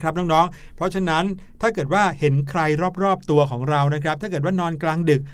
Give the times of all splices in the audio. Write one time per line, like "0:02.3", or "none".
none